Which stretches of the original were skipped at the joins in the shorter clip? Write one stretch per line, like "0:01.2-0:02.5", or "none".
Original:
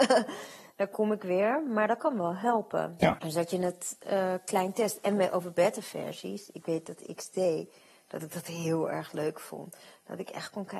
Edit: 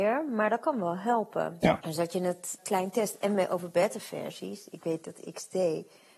0:04.0-0:04.4